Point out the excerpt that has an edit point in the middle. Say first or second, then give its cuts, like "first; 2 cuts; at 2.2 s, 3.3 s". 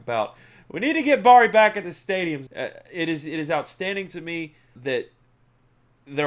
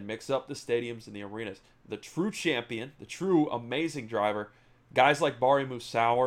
first; 2 cuts; at 2.5 s, 4.8 s